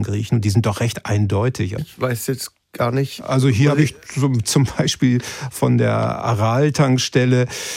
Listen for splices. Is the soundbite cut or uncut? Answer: cut